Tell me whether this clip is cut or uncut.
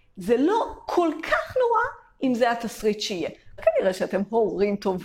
cut